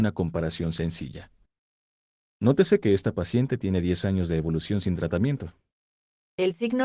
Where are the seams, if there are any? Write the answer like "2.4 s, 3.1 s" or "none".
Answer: 2.3 s